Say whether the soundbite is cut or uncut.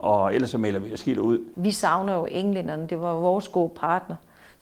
uncut